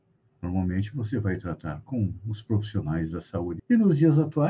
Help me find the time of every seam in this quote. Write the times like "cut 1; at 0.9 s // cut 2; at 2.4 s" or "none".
cut 1; at 3.6 s